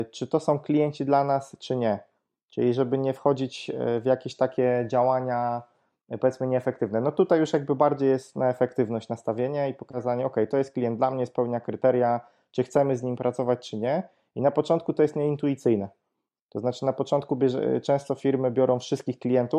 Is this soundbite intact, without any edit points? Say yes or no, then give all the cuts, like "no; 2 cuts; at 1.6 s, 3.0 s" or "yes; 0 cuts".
yes; 0 cuts